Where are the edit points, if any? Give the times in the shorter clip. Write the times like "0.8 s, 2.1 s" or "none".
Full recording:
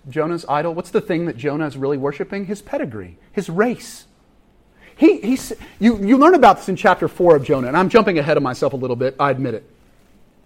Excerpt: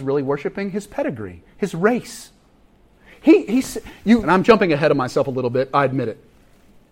4.2 s